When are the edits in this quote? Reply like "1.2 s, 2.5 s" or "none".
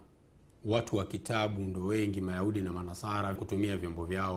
3.4 s

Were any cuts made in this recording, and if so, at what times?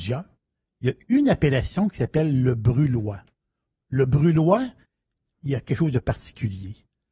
none

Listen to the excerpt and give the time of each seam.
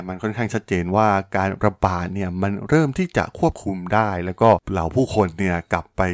4.6 s

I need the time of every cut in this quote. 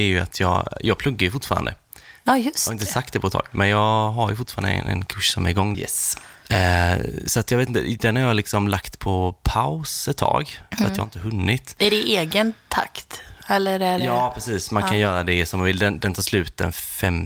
5.7 s

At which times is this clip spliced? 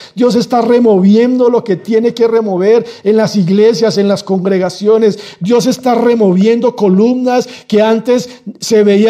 none

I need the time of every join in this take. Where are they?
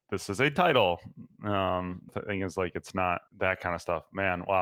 2.1 s, 3.3 s

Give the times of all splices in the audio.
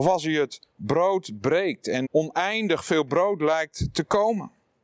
2.0 s

